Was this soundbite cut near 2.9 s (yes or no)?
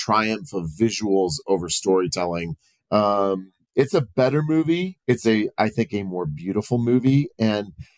yes